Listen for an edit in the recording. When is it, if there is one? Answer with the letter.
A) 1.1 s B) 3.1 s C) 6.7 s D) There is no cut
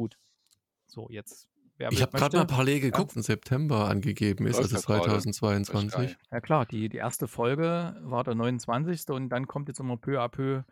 B